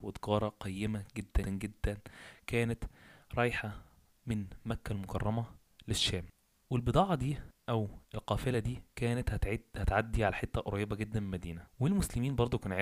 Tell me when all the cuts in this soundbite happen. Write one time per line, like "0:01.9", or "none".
0:01.4